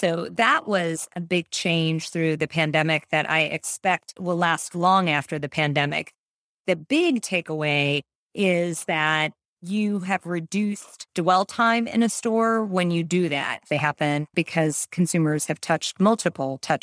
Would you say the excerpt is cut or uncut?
cut